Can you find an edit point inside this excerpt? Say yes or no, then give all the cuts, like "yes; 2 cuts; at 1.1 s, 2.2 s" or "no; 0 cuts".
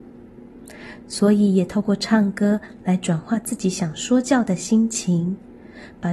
yes; 1 cut; at 1.0 s